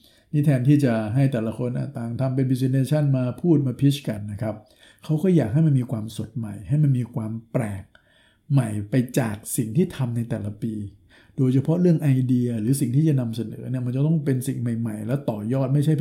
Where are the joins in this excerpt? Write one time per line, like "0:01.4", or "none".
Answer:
none